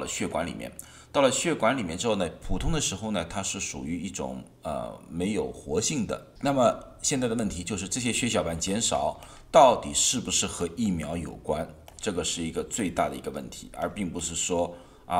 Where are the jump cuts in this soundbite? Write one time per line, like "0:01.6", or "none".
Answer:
0:06.4